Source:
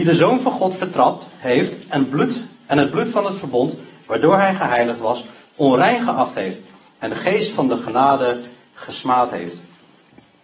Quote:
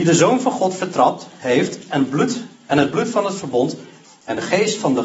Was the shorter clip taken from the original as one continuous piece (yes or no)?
no